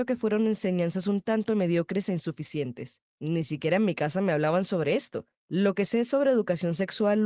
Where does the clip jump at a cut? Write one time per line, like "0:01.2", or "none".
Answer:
none